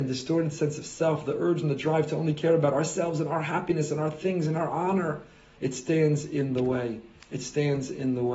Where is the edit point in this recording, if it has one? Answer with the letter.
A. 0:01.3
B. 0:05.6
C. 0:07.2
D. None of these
B